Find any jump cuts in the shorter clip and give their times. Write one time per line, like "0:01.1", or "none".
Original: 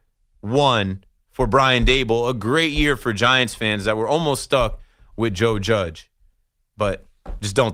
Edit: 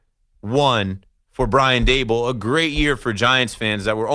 none